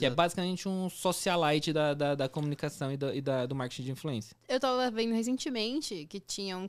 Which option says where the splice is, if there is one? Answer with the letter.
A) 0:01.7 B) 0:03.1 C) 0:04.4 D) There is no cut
D